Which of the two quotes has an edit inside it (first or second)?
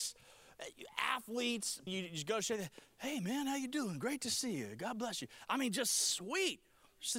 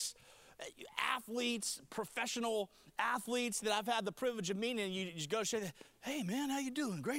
first